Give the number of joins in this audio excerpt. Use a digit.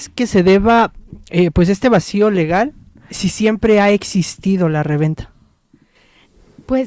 1